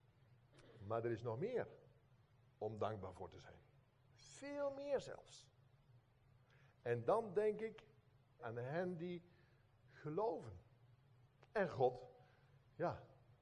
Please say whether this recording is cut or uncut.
cut